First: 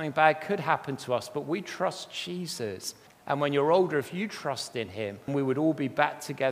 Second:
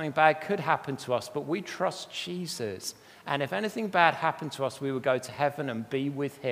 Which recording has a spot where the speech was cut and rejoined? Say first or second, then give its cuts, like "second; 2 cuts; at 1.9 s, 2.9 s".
first; 2 cuts; at 3.1 s, 5.3 s